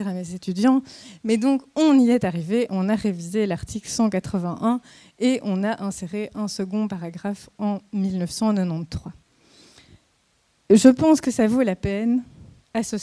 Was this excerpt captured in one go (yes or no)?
yes